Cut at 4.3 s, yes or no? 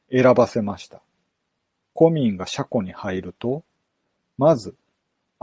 no